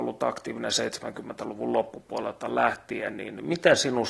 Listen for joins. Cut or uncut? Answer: uncut